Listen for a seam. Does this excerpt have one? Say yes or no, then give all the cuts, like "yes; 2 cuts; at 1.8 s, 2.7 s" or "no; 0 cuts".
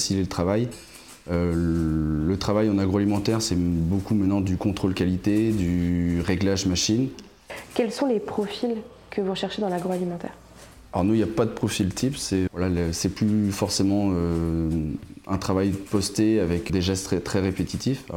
yes; 2 cuts; at 12.5 s, 16.7 s